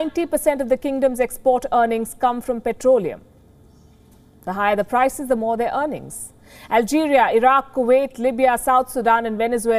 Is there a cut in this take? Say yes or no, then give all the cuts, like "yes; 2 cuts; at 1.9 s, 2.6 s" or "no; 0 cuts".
no; 0 cuts